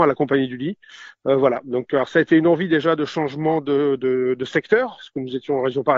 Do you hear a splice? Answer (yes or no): yes